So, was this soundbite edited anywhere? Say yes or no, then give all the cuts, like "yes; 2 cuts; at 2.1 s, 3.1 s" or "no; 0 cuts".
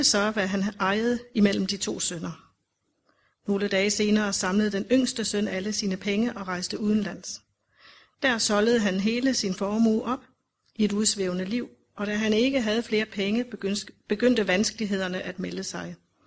no; 0 cuts